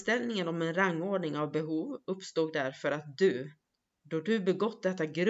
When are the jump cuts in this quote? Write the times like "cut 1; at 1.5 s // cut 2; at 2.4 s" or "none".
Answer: none